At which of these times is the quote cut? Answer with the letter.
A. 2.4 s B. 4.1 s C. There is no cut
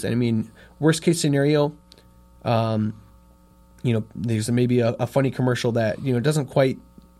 C